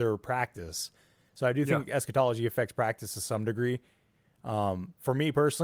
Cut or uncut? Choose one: uncut